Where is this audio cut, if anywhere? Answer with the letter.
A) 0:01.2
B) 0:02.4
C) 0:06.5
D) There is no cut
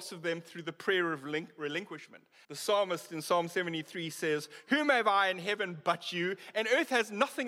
B